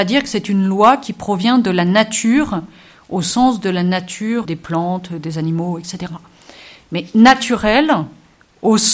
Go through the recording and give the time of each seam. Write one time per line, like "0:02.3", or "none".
0:04.4